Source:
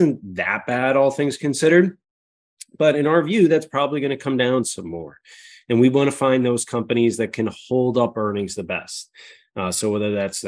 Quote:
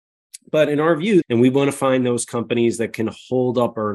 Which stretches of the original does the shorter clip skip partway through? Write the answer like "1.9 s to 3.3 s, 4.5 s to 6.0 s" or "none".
3.5 s to 5.6 s